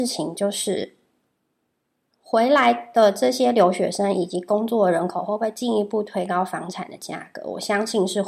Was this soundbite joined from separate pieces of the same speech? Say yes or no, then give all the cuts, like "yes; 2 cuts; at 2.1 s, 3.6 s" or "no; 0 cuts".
no; 0 cuts